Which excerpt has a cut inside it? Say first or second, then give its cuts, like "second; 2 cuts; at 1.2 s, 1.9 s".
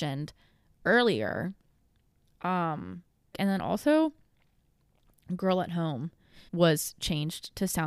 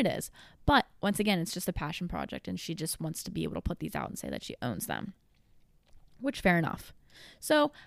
first; 2 cuts; at 3.3 s, 6.5 s